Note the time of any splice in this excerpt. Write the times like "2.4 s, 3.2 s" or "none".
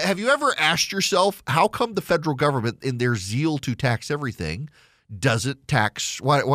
none